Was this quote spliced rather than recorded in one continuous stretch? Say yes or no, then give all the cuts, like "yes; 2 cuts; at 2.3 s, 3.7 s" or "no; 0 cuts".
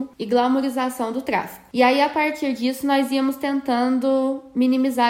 no; 0 cuts